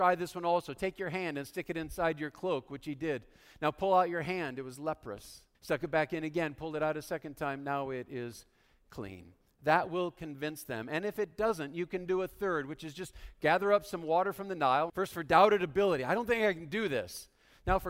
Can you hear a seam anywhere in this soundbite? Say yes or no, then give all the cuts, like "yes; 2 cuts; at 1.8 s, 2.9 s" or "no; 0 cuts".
yes; 2 cuts; at 5.5 s, 14.9 s